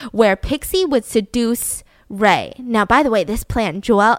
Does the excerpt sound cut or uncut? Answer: uncut